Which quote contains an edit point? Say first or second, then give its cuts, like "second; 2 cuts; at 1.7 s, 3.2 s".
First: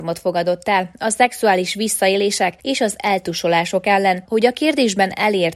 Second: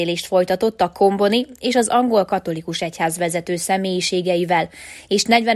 first; 1 cut; at 4.3 s